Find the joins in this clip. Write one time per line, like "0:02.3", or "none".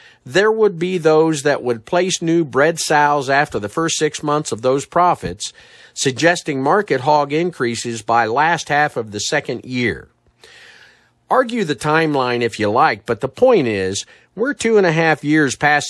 none